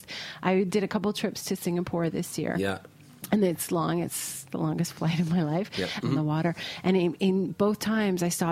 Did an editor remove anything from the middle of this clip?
yes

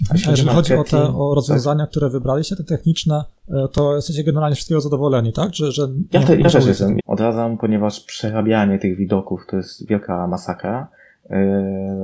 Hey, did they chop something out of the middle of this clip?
yes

